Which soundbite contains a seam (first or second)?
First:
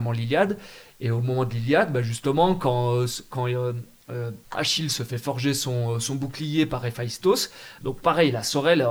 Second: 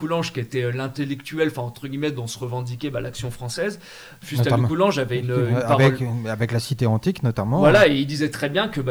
first